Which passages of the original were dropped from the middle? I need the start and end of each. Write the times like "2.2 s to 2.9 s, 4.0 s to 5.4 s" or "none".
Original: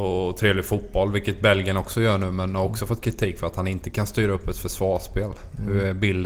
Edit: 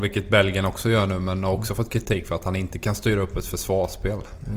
none